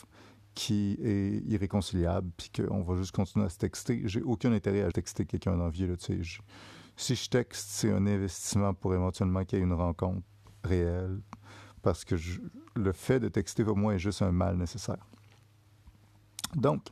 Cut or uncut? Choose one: cut